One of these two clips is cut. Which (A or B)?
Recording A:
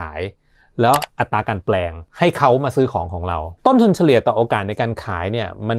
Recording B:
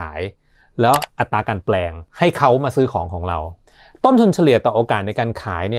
A